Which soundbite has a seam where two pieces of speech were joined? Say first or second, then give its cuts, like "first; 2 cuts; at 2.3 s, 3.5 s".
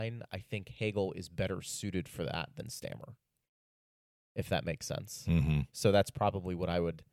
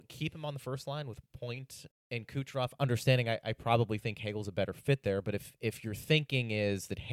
second; 1 cut; at 1.9 s